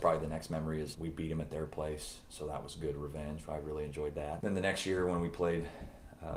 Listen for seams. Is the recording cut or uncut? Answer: cut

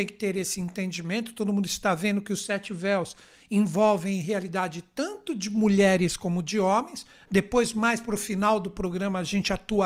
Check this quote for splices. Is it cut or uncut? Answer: uncut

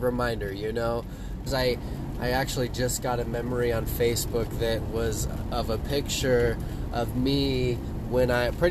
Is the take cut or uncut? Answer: cut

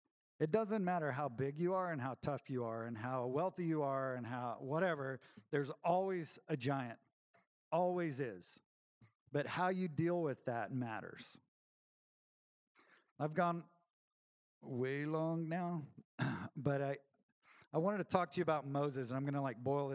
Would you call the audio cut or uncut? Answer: uncut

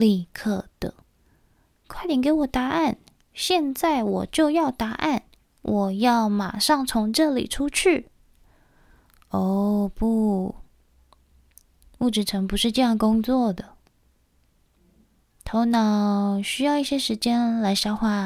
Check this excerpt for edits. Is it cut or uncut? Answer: uncut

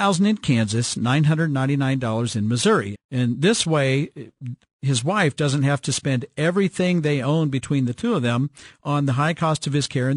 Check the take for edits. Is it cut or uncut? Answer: cut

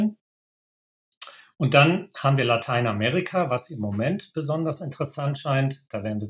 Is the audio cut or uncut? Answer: uncut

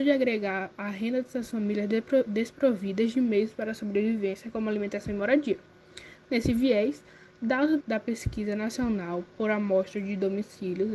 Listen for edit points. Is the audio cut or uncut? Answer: cut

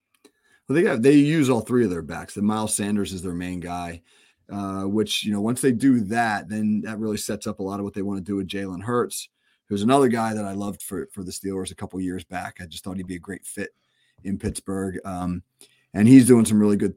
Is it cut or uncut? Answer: cut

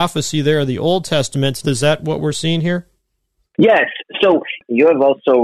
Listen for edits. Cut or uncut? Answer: cut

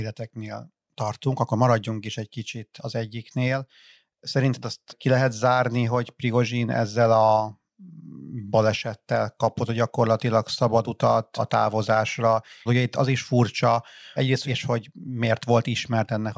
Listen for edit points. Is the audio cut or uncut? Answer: cut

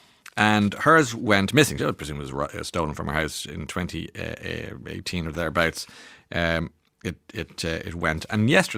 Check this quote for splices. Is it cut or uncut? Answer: uncut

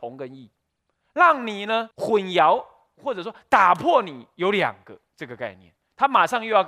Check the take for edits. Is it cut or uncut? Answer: cut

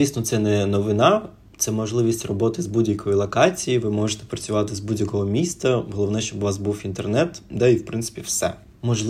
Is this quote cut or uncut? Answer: uncut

